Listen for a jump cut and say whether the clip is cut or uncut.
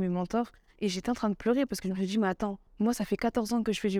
cut